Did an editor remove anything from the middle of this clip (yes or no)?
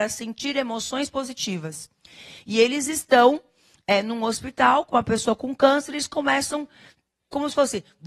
no